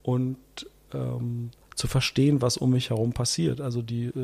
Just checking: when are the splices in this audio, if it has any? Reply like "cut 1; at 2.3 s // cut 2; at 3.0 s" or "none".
none